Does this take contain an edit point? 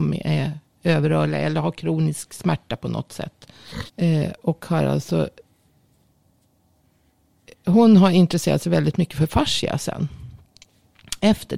yes; 1 cut; at 3.9 s

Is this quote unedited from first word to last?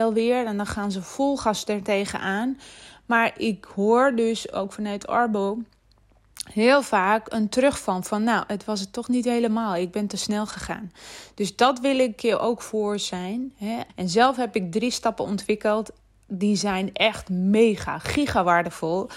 no; 1 cut; at 13.9 s

